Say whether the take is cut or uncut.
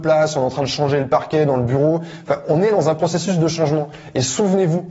uncut